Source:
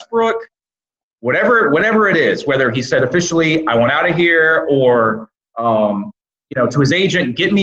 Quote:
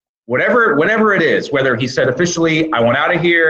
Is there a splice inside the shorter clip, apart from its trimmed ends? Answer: no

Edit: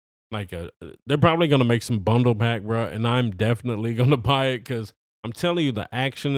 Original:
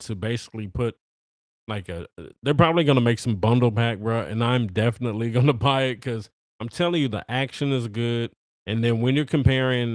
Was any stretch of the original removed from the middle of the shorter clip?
no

